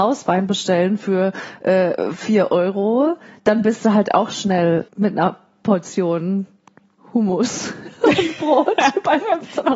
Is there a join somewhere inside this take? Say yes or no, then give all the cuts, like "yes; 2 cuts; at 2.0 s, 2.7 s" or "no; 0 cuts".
yes; 1 cut; at 4.9 s